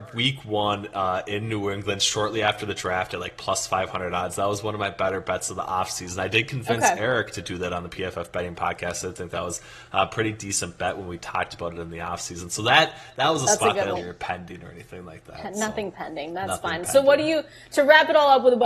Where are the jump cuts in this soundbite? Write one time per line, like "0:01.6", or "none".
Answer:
0:13.9